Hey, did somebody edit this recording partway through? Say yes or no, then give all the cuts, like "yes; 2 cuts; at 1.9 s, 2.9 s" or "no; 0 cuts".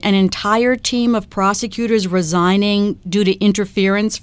no; 0 cuts